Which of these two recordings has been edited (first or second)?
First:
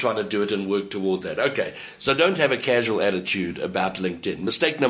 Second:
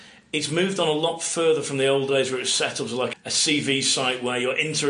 second